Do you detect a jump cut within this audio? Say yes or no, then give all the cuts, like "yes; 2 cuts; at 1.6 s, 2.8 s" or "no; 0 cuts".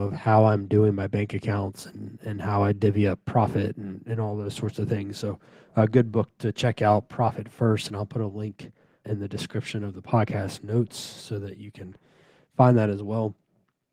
no; 0 cuts